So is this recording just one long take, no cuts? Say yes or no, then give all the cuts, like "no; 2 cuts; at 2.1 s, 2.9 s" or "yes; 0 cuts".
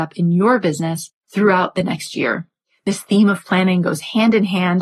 yes; 0 cuts